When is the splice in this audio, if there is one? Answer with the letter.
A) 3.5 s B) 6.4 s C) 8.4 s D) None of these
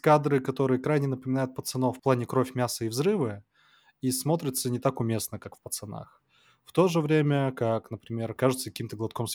C